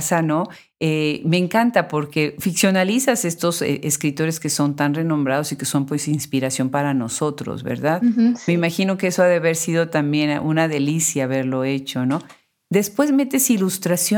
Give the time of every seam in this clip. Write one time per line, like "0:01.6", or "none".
none